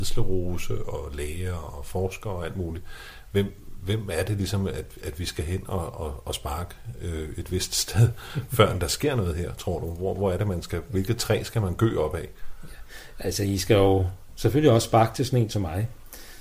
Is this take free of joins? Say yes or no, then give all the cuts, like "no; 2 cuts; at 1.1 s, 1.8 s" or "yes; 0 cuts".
yes; 0 cuts